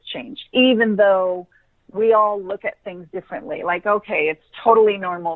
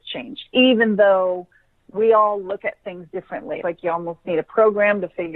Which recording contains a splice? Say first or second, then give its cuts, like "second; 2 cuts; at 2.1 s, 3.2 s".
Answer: second; 1 cut; at 3.6 s